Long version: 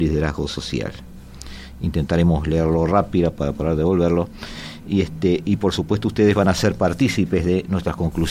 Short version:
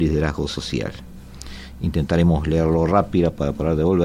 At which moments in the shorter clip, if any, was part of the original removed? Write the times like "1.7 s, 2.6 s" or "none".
none